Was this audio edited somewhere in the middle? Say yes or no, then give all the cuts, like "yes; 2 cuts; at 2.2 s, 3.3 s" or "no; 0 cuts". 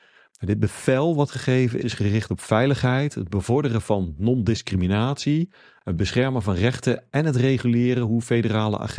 yes; 1 cut; at 1.8 s